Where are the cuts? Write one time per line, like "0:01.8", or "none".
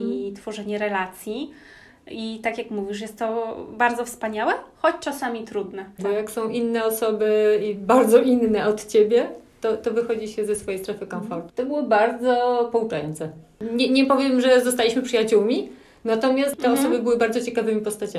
0:06.0
0:11.5